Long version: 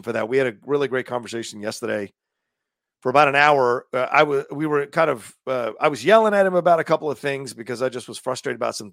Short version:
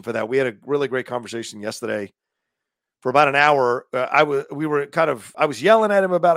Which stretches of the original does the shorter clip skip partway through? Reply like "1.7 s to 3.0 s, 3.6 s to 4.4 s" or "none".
5.3 s to 5.8 s